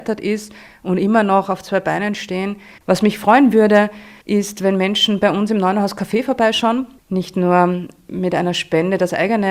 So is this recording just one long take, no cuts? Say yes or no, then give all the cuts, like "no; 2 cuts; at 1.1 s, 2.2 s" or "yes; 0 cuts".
no; 3 cuts; at 2.8 s, 4.2 s, 7.0 s